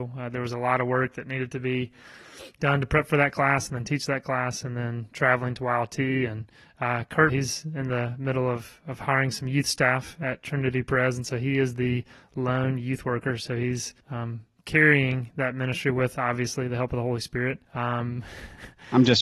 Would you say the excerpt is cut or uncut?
cut